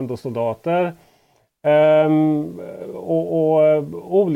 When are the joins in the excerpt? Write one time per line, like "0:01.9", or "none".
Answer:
none